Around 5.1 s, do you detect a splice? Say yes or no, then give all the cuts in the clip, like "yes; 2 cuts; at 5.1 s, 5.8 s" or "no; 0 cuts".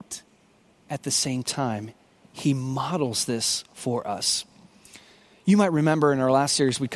no; 0 cuts